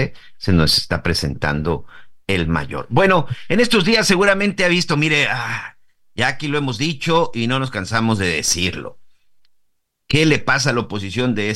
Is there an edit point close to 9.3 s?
no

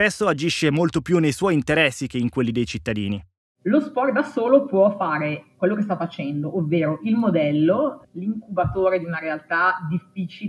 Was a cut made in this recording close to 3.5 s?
no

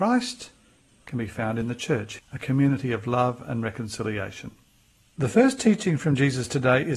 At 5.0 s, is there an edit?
yes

